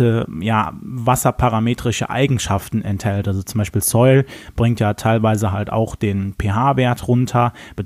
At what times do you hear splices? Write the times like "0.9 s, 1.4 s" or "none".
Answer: none